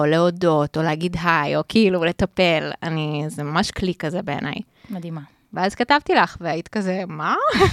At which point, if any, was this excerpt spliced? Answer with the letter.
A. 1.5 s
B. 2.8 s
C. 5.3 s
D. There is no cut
D